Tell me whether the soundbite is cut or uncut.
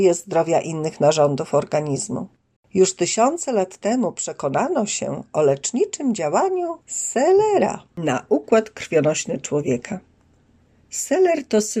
cut